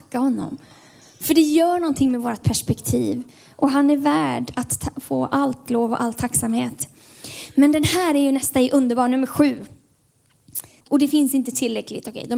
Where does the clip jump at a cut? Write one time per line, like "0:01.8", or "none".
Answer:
0:10.8